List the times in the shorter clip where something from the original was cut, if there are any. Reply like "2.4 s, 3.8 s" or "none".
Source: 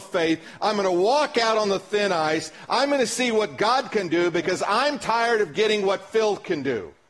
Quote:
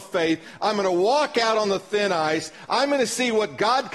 none